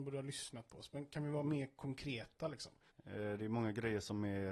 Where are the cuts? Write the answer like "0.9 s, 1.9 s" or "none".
2.9 s